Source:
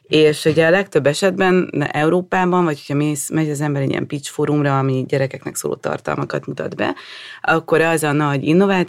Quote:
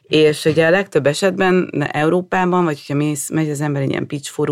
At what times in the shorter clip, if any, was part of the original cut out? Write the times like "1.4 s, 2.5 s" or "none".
none